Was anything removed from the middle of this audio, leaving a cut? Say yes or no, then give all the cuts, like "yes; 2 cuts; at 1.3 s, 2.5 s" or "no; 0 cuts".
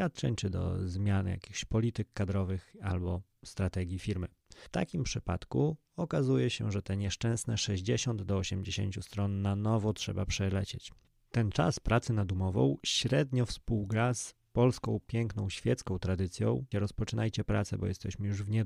yes; 1 cut; at 16.7 s